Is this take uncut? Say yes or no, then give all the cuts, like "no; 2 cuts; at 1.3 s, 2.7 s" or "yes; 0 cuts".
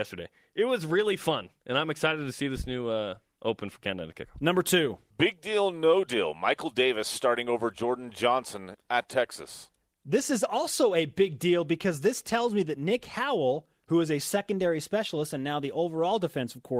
yes; 0 cuts